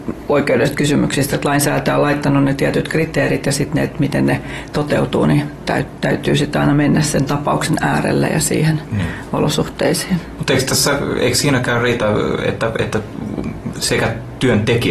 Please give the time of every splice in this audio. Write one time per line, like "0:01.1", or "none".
0:01.3